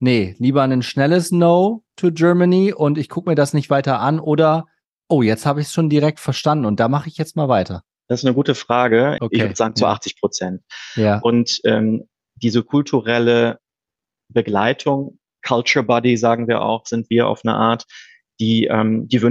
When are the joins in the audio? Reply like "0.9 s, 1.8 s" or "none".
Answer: 9.2 s